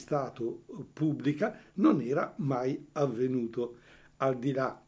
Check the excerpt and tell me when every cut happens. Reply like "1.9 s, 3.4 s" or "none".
none